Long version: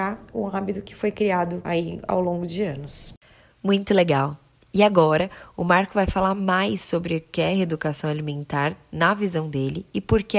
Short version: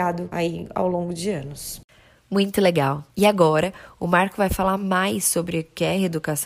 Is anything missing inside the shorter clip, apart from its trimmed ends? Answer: yes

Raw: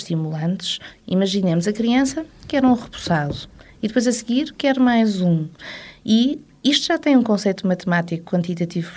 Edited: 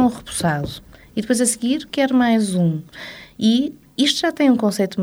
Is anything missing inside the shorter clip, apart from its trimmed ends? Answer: no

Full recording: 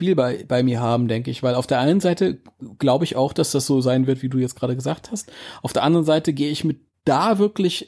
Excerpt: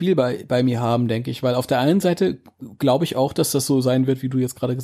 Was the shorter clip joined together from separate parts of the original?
no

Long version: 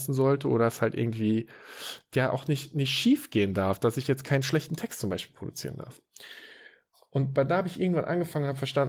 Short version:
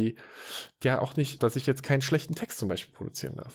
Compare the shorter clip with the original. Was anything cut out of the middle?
yes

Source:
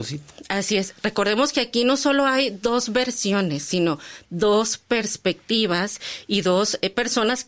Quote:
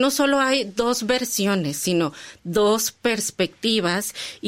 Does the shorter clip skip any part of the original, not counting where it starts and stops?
no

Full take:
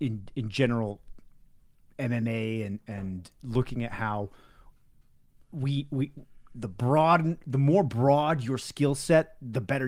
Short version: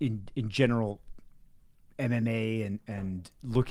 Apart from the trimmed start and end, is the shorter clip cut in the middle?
no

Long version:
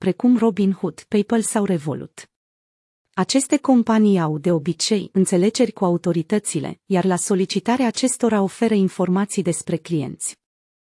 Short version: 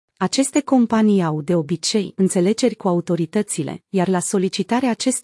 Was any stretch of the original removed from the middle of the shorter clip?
no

